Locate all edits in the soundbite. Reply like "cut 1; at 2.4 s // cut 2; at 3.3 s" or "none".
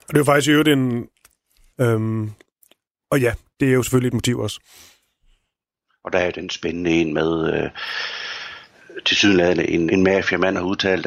cut 1; at 1.7 s // cut 2; at 9.9 s